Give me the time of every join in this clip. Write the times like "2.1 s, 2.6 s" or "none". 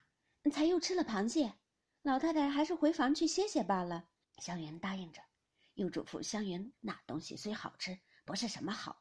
4.2 s, 6.7 s